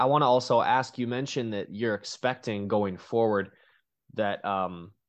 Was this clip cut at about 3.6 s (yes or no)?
no